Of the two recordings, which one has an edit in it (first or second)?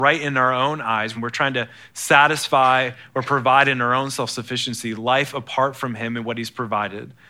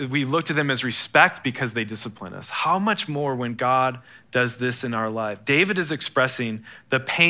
first